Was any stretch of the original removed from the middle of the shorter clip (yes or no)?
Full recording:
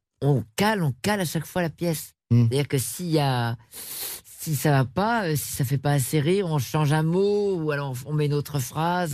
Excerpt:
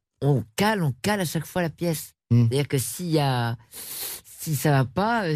no